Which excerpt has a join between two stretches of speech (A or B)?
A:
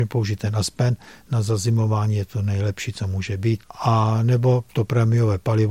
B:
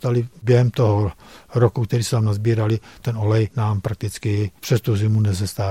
A